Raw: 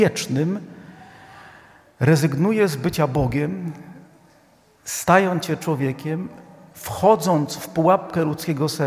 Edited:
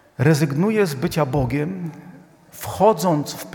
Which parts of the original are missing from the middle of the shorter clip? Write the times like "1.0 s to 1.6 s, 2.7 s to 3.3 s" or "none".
4.3 s to 6.7 s